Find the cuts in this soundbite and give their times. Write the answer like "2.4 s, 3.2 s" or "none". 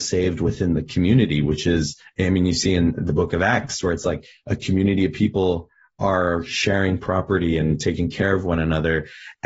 none